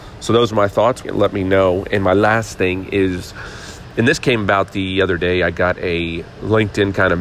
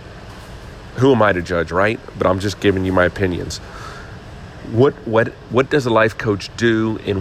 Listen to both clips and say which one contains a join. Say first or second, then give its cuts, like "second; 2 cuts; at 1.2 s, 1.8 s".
first; 1 cut; at 1.0 s